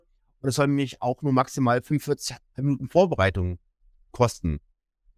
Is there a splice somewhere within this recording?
no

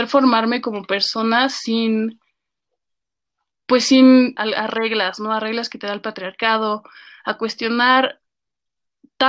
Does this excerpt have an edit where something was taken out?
yes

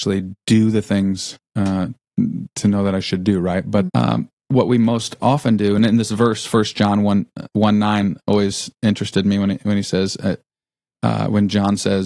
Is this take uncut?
no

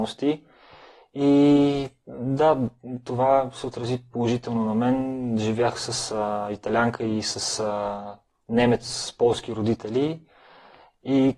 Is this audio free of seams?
yes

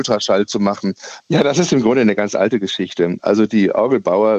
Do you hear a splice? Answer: yes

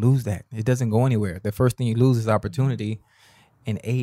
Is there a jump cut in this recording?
no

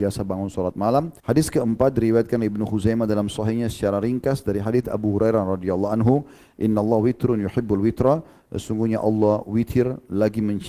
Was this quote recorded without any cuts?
no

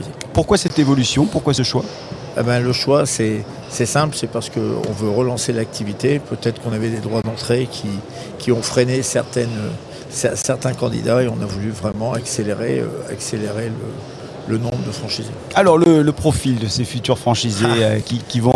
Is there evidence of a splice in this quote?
no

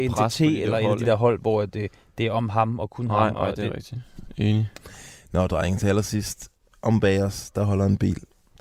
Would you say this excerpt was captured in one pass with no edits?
yes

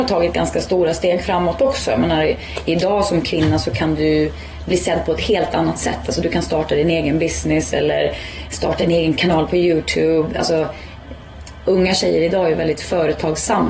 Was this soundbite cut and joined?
no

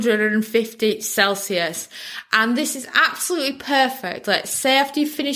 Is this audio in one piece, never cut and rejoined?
yes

